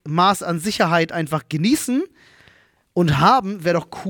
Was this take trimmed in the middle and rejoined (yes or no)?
no